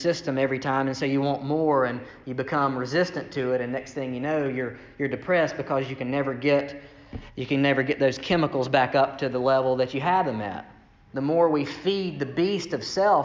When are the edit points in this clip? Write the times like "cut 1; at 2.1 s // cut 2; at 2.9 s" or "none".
cut 1; at 11.1 s

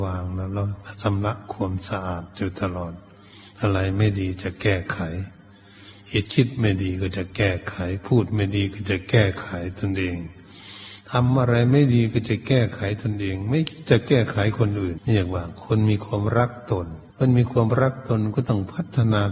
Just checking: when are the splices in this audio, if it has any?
cut 1; at 15.0 s // cut 2; at 17.1 s

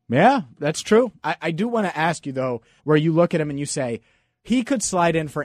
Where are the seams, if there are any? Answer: cut 1; at 1.2 s // cut 2; at 2.8 s

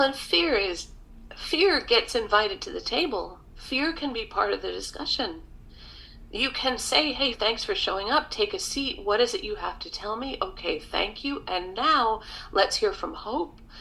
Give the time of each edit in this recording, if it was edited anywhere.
cut 1; at 7.3 s

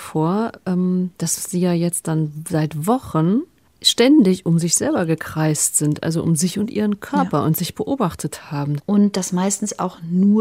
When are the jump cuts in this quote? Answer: cut 1; at 1.1 s // cut 2; at 8.8 s

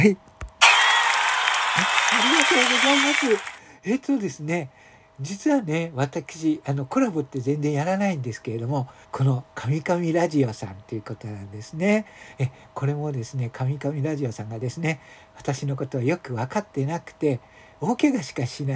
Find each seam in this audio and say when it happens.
cut 1; at 9.0 s

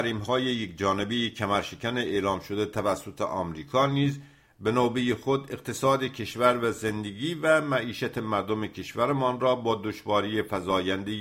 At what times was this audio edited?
none

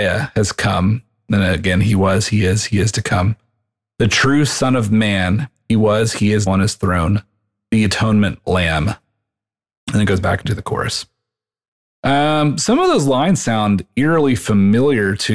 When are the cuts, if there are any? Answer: cut 1; at 6.5 s

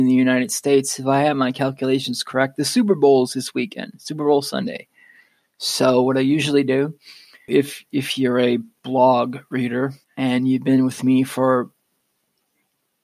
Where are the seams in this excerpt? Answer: cut 1; at 7.5 s // cut 2; at 10.0 s

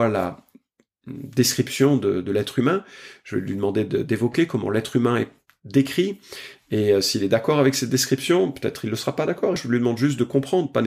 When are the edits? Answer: cut 1; at 9.6 s

